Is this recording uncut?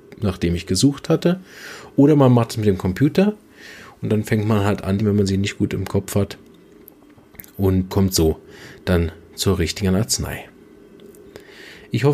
no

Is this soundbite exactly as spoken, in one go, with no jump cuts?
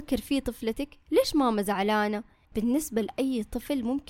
no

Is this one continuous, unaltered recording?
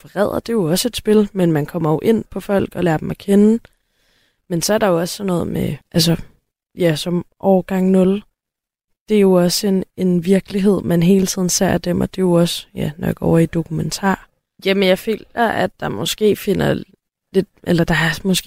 no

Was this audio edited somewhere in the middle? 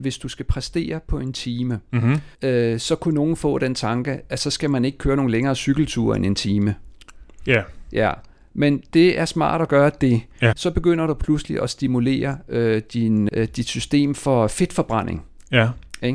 yes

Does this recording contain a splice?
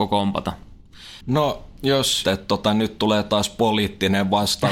yes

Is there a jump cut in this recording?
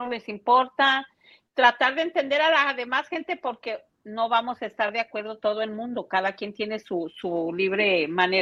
no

